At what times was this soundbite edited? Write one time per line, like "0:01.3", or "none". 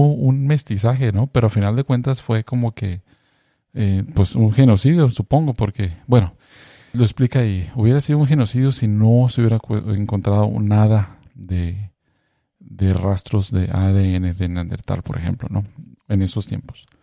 0:06.9